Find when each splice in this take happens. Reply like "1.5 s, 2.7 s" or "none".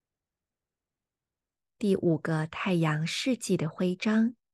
1.8 s